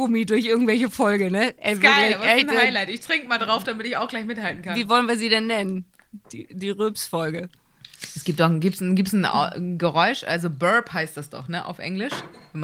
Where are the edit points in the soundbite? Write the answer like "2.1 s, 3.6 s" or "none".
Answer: 6.2 s